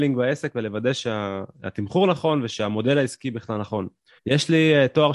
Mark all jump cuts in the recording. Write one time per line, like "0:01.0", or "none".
0:04.2